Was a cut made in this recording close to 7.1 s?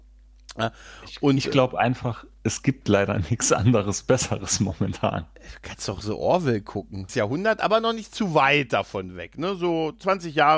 yes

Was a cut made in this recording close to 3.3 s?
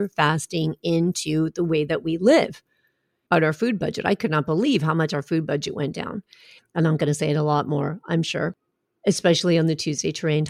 yes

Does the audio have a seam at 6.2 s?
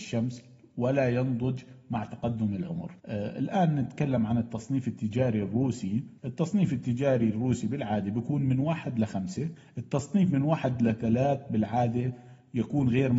yes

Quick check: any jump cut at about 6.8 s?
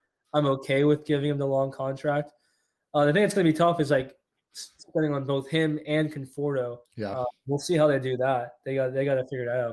yes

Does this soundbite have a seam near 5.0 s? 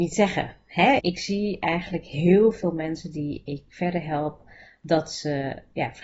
no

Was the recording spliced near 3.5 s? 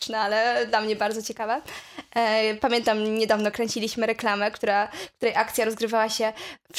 yes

